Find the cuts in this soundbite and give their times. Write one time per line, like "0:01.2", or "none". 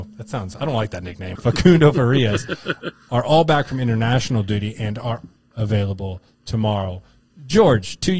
0:01.4
0:05.4